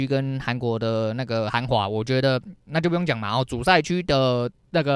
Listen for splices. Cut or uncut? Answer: uncut